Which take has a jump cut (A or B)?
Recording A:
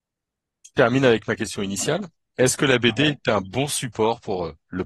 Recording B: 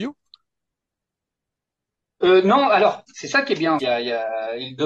B